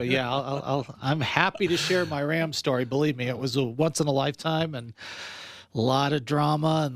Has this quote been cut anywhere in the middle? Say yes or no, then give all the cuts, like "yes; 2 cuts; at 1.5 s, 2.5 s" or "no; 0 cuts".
no; 0 cuts